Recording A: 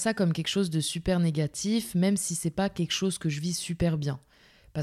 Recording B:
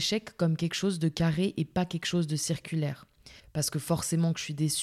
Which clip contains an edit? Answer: B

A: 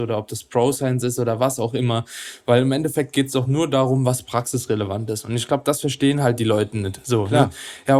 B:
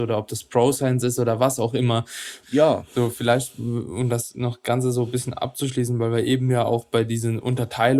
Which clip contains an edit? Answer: B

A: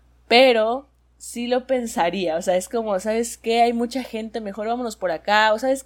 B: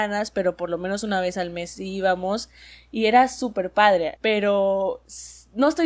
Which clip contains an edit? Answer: B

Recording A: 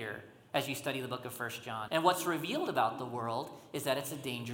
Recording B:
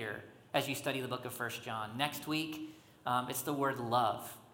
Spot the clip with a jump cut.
A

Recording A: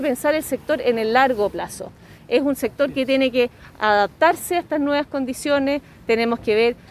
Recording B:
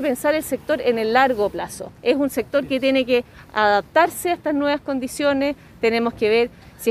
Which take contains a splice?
B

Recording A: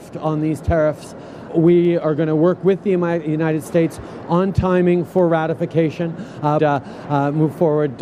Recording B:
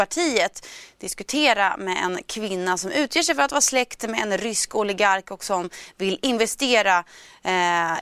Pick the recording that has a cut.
A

